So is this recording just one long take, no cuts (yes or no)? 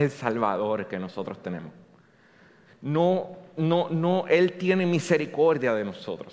no